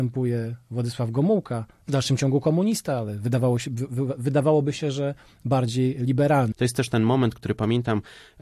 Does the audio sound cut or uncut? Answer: cut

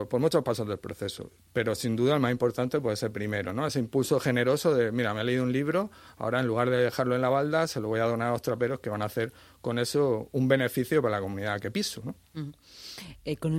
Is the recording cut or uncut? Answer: uncut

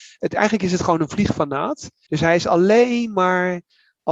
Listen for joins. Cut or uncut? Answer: cut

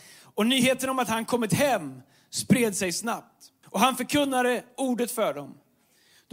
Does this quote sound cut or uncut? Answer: cut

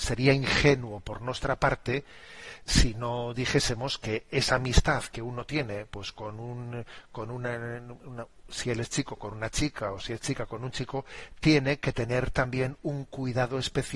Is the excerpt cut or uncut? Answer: uncut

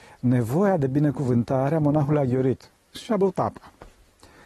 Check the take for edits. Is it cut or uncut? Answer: cut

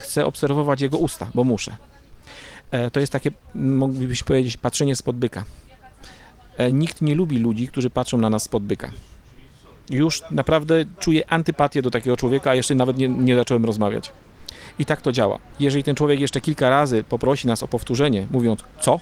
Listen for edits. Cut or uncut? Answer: uncut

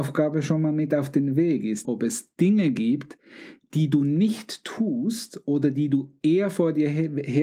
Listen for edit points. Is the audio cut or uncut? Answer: cut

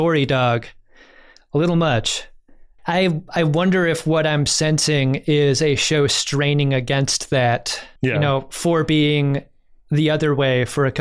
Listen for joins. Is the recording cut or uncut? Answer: cut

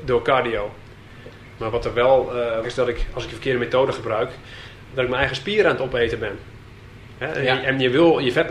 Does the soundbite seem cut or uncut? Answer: cut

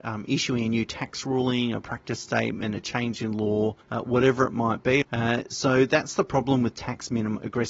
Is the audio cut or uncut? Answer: cut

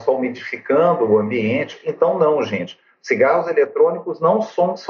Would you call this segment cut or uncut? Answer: uncut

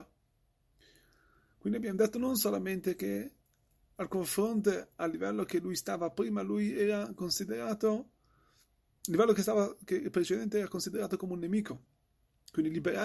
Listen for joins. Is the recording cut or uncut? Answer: uncut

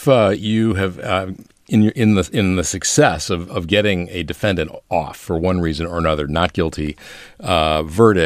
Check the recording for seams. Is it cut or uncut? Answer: uncut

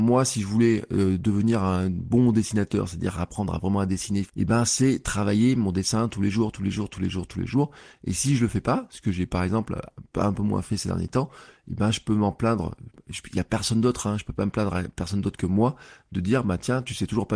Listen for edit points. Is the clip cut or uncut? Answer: cut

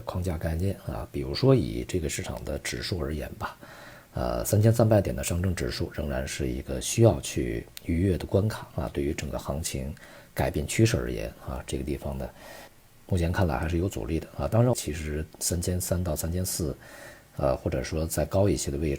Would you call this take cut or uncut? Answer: cut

